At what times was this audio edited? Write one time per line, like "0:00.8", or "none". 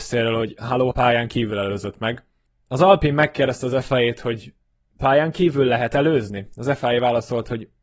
0:00.9
0:02.5